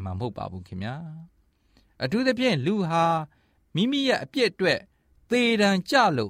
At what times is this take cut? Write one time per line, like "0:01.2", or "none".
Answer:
none

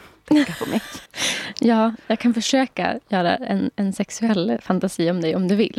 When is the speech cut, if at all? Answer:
0:01.1

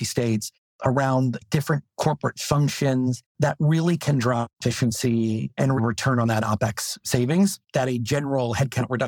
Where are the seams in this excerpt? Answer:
0:05.8

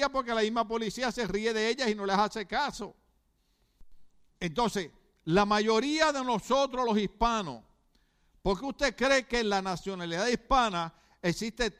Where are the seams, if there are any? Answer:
0:04.3

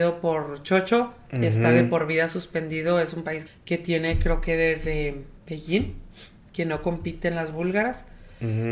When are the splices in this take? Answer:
0:03.5

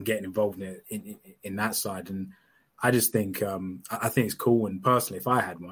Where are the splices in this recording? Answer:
none

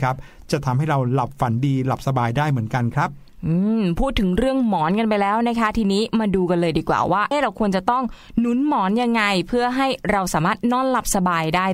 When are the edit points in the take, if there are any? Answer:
0:07.3

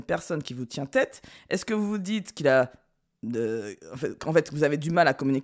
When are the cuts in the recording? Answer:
none

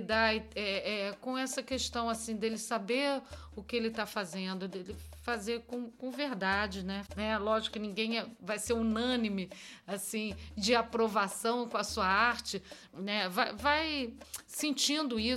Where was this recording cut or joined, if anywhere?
0:07.1
0:12.9

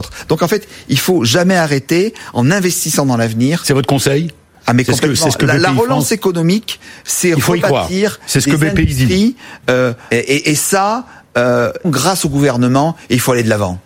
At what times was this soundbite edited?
0:10.1
0:11.8

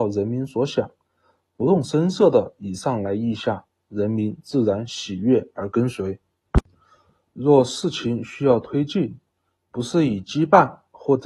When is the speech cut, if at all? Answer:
none

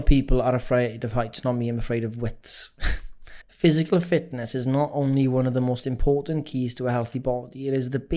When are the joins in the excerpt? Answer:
0:03.4

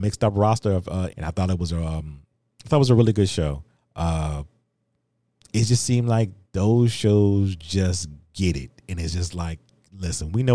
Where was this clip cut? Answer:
0:01.1
0:03.7

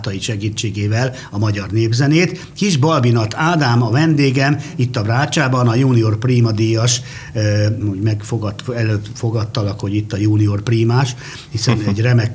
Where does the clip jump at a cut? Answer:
0:07.8

